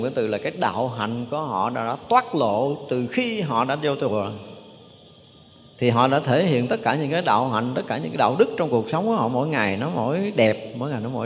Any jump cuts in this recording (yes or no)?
no